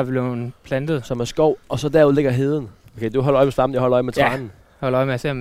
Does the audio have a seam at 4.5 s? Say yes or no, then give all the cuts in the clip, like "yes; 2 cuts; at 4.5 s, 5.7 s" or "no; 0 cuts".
no; 1 cut; at 2.8 s